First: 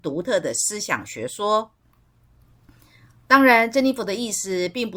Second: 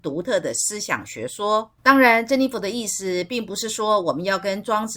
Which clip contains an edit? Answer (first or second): second